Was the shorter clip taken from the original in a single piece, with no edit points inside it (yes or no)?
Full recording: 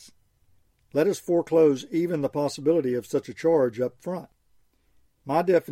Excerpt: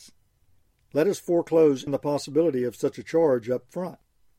no